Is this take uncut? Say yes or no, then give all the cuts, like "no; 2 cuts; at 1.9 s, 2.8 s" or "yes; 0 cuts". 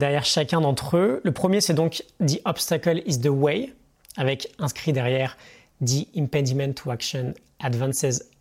yes; 0 cuts